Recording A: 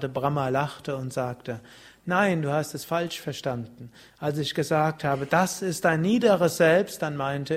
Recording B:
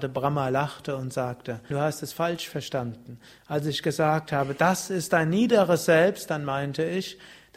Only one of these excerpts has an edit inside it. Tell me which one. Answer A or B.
B